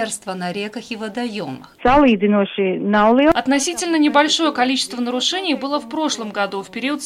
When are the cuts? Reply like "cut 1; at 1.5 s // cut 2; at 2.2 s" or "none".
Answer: cut 1; at 1.8 s